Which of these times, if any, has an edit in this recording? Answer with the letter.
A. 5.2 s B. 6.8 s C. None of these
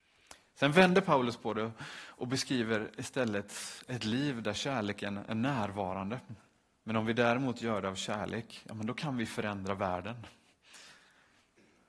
B